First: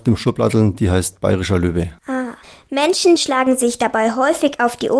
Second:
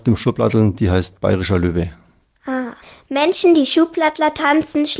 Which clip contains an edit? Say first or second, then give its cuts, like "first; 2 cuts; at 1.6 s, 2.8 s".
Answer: first; 2 cuts; at 2.0 s, 3.2 s